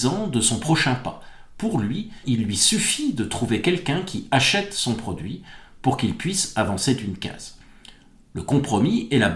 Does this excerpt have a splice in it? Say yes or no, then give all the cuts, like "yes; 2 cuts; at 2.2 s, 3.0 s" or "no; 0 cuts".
yes; 1 cut; at 2.2 s